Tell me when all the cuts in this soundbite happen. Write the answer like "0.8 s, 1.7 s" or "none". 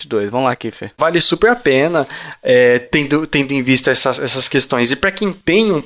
1.0 s